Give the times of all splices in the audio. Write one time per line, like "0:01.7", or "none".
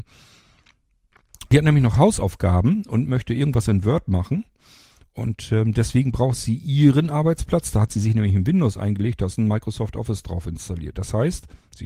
0:01.5

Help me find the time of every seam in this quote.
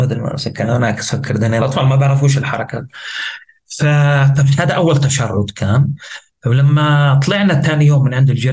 0:01.6

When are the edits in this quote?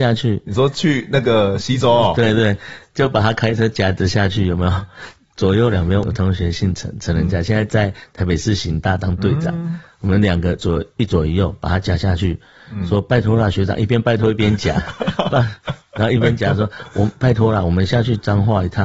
0:06.0

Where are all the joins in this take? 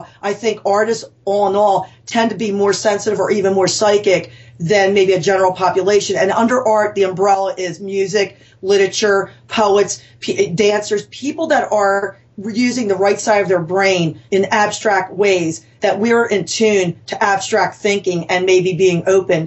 none

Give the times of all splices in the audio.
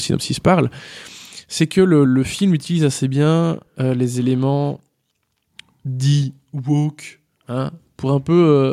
0:02.1

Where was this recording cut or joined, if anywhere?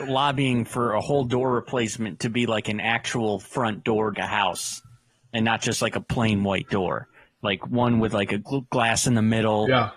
0:04.1
0:08.5

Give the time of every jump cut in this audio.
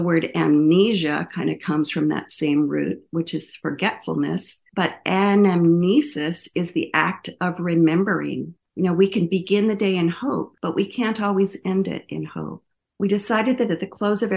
none

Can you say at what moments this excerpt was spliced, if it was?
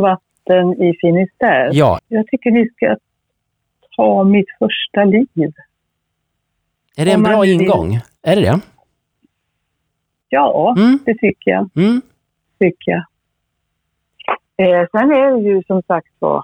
0:02.0

